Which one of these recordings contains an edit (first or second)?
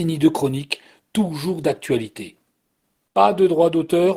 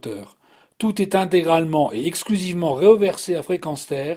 first